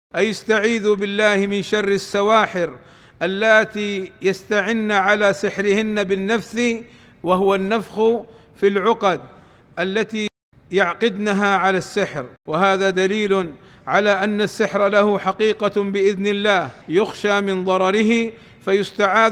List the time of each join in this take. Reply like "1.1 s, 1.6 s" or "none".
12.4 s, 16.8 s